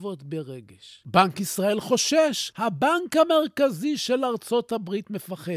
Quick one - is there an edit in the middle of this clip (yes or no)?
yes